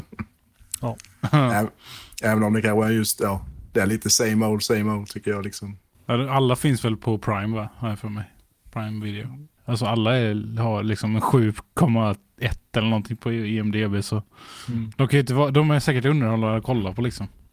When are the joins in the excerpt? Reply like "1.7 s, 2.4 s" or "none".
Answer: 9.6 s